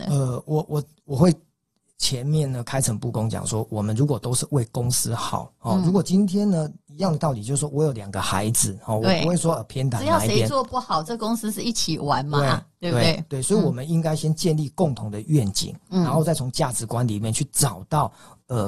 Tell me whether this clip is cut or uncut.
uncut